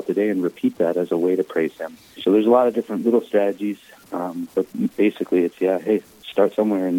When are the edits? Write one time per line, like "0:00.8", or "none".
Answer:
0:02.2

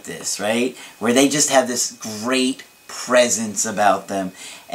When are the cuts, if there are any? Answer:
none

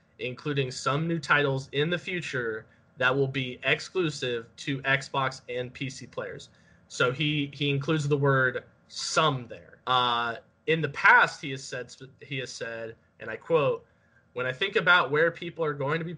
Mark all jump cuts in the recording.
0:09.8

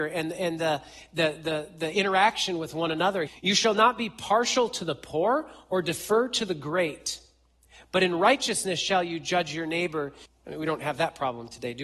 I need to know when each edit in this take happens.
0:03.3
0:10.3

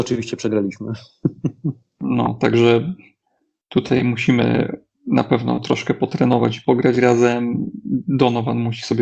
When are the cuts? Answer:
none

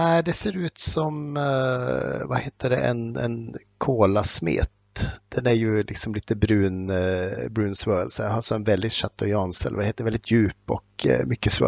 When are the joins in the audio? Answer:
none

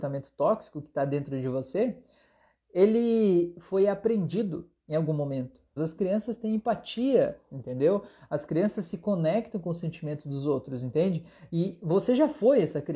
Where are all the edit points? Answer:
0:05.8

